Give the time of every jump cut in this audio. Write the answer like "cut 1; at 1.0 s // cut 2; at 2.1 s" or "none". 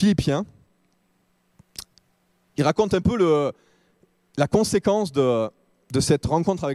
none